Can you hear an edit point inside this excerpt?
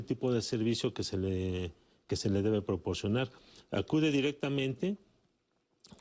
no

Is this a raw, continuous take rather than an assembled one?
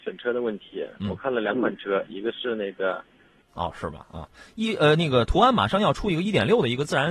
no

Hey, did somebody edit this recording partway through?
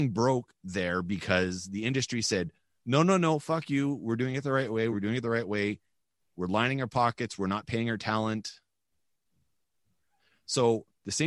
yes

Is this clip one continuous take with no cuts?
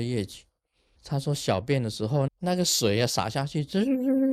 no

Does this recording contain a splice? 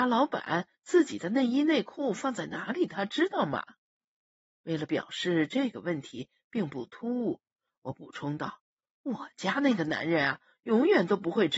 no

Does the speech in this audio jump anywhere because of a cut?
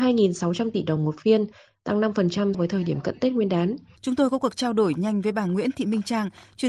yes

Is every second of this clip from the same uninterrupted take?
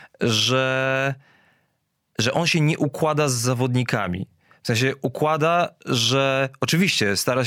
yes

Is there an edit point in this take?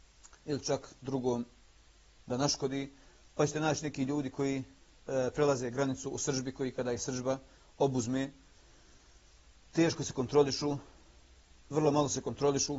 no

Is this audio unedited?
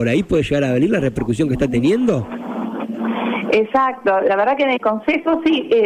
yes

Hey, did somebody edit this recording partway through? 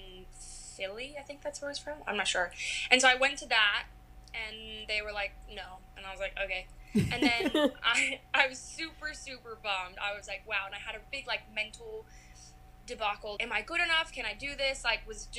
yes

